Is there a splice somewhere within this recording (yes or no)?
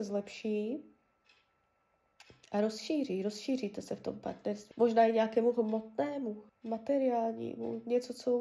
yes